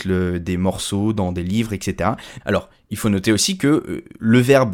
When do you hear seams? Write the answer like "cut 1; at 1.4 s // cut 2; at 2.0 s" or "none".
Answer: cut 1; at 2.4 s